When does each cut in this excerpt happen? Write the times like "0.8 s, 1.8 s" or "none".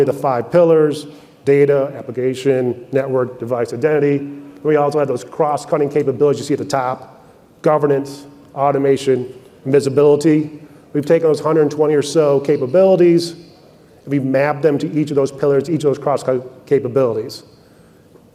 none